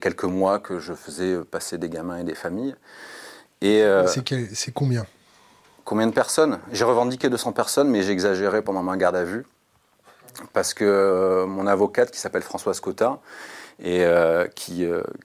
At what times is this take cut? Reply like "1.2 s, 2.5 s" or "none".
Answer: none